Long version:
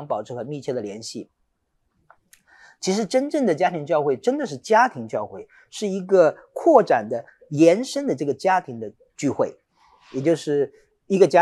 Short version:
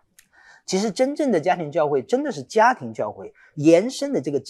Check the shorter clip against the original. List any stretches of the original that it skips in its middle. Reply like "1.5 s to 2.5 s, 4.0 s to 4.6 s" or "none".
5.7 s to 7.5 s